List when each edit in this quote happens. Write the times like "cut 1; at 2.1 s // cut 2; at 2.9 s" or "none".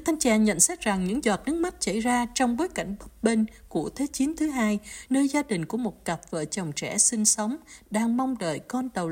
cut 1; at 5.0 s

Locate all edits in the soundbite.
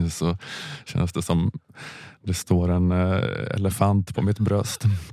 none

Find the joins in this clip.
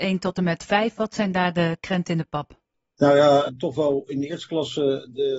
cut 1; at 3.5 s

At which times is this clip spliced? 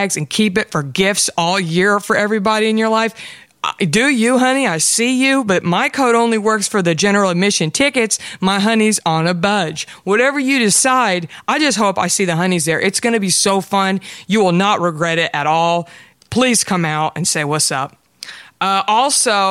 none

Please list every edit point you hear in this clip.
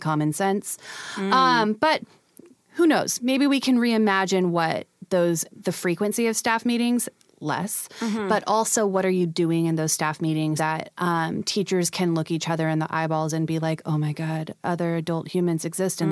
cut 1; at 5.6 s // cut 2; at 10.6 s

